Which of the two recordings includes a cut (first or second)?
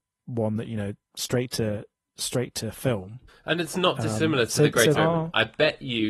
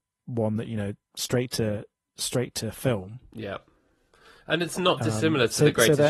first